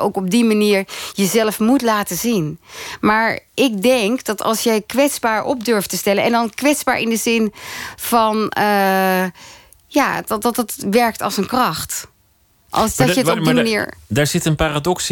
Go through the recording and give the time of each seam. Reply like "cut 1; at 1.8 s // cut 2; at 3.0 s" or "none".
none

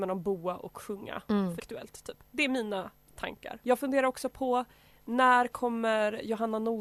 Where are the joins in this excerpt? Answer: cut 1; at 1.6 s // cut 2; at 3.6 s

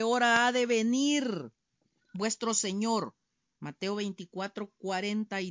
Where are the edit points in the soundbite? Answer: none

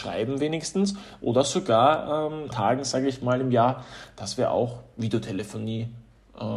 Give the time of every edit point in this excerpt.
cut 1; at 2.5 s

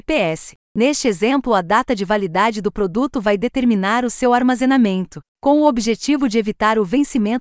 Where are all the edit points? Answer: cut 1; at 5.3 s

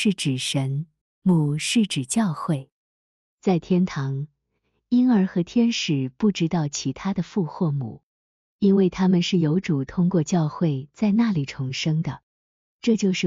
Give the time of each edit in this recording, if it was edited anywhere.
cut 1; at 1.0 s

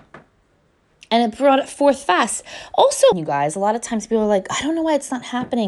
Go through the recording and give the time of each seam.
cut 1; at 3.1 s

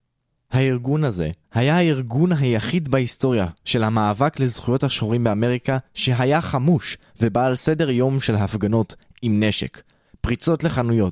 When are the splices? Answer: cut 1; at 1.4 s

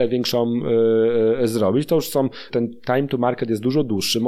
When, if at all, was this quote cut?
cut 1; at 2.5 s

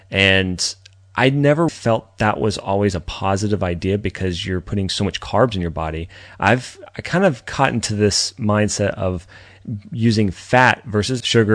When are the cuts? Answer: cut 1; at 1.7 s

